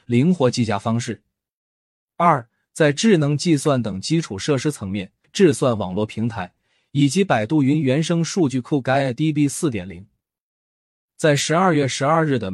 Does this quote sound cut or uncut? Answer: cut